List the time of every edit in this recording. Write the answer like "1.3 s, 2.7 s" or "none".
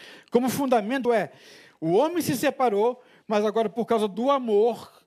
1.1 s